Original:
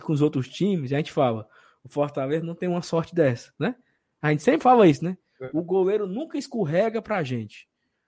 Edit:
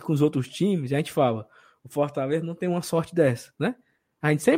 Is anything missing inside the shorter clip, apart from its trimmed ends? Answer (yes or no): no